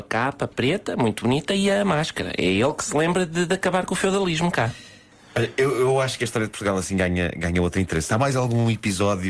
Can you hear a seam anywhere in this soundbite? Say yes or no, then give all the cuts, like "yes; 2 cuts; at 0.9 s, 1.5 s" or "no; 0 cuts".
no; 0 cuts